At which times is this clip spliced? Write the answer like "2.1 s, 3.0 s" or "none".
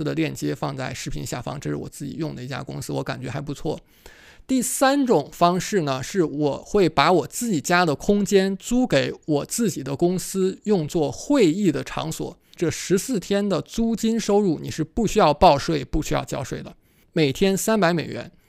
12.6 s, 17.0 s